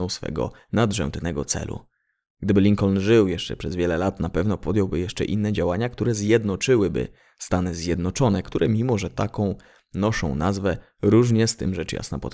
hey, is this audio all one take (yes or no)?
yes